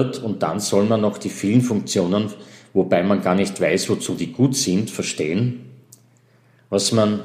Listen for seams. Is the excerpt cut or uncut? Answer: uncut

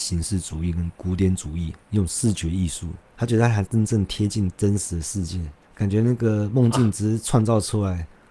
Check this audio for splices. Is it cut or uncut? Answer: cut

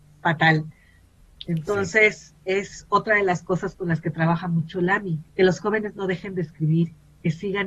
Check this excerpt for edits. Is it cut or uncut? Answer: cut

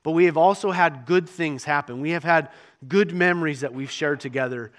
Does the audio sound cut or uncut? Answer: uncut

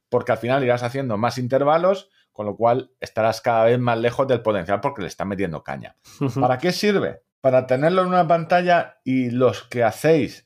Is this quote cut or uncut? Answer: cut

